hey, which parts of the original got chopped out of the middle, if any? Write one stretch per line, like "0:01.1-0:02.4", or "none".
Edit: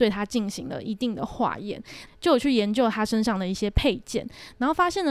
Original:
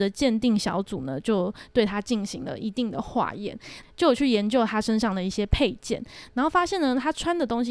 none